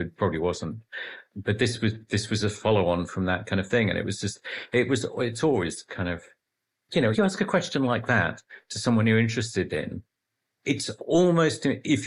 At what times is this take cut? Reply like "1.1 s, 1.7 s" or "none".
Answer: 7.1 s